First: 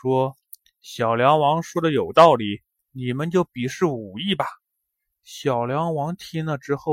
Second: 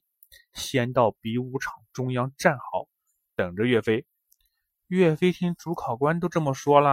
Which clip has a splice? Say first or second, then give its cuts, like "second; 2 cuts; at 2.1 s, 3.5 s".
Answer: first; 1 cut; at 2.8 s